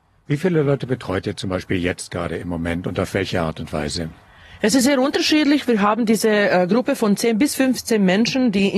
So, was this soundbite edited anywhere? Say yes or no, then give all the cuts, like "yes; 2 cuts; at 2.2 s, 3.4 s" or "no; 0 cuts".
no; 0 cuts